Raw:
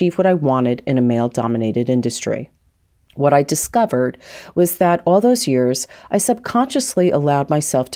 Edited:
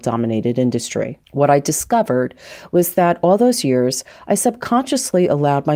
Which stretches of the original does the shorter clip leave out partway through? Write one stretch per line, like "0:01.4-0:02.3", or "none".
0:02.5-0:03.1